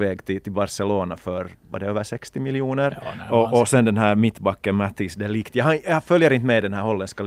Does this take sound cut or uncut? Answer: uncut